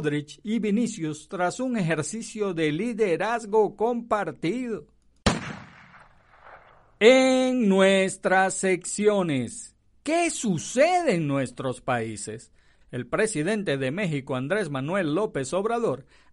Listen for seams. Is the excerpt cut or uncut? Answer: cut